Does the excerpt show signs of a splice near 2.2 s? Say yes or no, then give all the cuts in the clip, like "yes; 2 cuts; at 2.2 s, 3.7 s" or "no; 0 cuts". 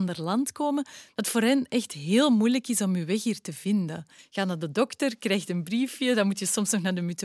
no; 1 cut; at 4.2 s